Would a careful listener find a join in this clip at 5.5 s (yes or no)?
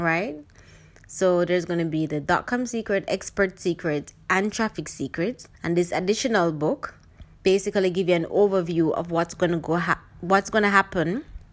yes